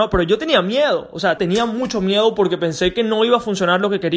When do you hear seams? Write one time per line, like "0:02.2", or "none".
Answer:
0:01.4